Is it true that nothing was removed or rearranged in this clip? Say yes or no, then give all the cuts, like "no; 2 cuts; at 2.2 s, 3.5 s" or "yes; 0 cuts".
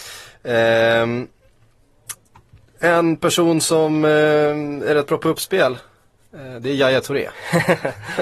yes; 0 cuts